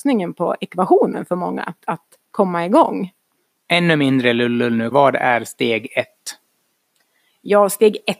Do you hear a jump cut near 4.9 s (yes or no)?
yes